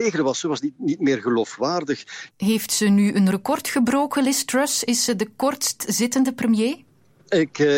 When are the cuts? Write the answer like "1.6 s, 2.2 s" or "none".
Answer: 2.3 s

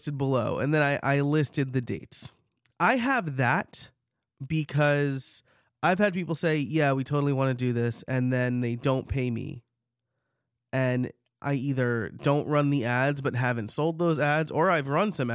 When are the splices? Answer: 2.7 s

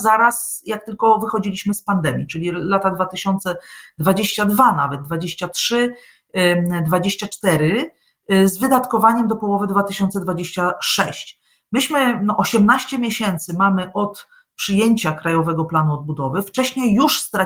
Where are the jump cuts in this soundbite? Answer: none

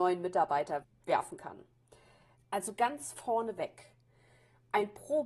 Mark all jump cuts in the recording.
2.4 s

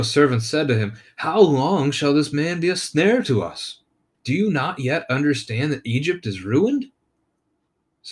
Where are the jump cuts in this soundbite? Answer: 4.1 s

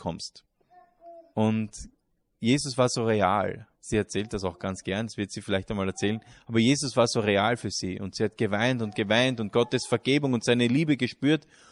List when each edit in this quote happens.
1.3 s, 3.7 s

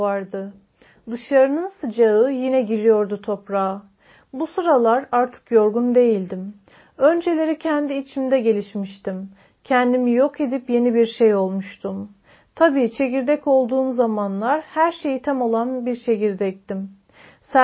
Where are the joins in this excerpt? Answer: none

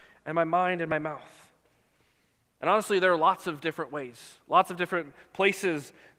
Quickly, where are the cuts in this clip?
none

